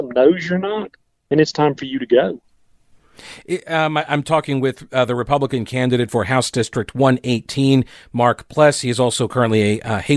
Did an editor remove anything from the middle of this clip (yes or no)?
no